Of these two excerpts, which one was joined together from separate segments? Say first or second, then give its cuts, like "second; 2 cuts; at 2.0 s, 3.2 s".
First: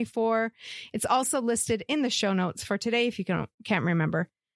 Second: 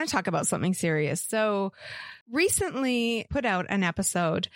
second; 2 cuts; at 2.2 s, 3.3 s